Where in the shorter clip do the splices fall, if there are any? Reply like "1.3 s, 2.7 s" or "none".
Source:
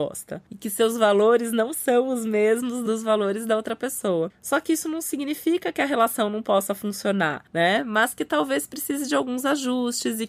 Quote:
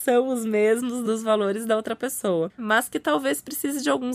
2.6 s